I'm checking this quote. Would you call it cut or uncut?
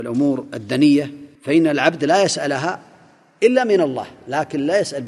cut